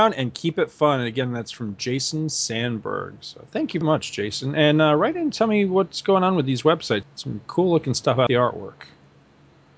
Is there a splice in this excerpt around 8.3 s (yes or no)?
yes